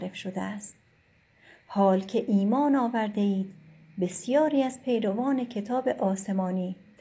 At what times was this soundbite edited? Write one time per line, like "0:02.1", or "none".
none